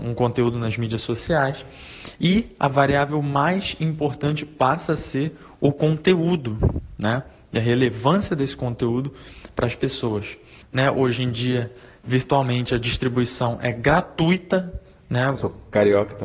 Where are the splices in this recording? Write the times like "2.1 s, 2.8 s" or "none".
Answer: 10.6 s, 15.3 s